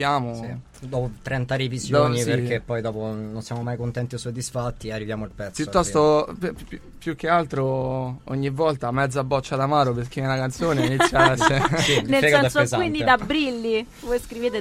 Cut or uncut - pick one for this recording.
cut